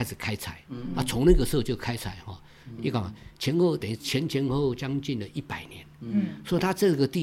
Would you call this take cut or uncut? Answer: cut